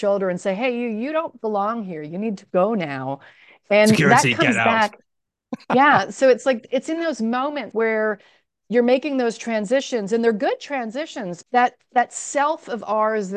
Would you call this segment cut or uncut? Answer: cut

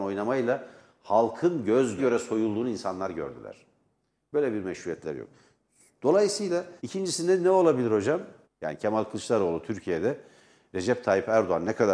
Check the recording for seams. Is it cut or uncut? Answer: cut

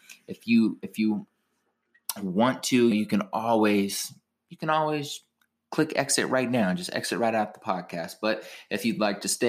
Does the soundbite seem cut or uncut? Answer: cut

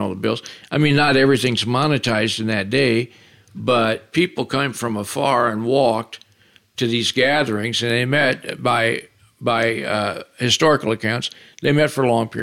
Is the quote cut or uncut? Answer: uncut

